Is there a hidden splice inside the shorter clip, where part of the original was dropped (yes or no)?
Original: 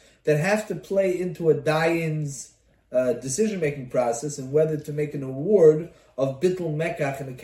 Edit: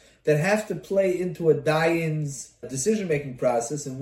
yes